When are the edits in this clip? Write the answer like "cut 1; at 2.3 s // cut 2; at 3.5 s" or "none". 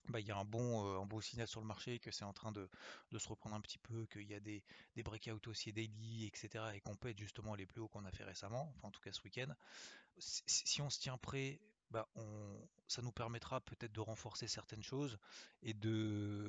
cut 1; at 10.1 s // cut 2; at 12.1 s

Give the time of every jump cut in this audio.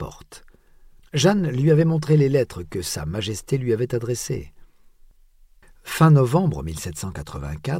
cut 1; at 1.0 s

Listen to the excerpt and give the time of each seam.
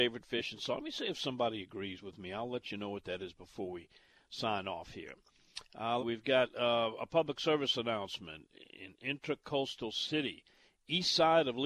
cut 1; at 6.0 s

